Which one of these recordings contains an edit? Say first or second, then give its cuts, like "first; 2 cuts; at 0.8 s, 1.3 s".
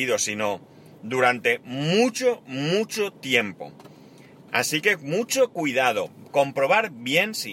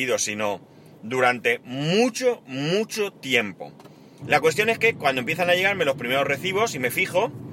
second; 1 cut; at 4.2 s